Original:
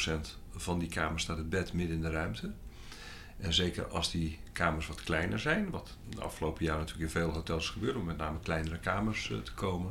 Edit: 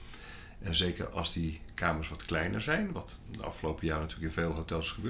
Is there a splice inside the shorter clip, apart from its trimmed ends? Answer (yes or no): no